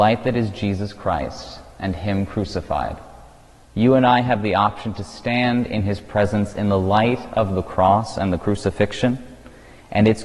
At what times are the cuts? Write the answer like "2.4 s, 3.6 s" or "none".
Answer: 3.7 s